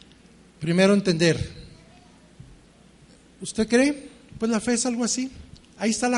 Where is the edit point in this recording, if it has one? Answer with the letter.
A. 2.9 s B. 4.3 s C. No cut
B